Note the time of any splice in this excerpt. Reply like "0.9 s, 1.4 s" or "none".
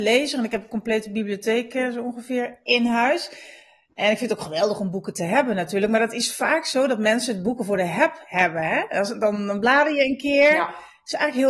none